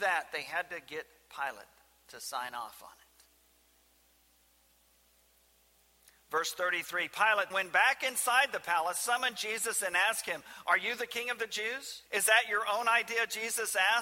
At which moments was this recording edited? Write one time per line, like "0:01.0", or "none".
0:07.5
0:12.1